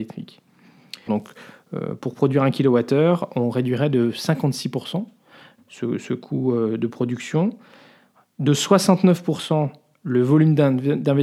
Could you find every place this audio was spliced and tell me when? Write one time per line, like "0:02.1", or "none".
0:01.1
0:05.6